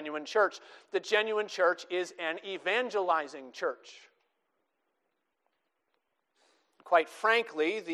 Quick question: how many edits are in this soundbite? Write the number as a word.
zero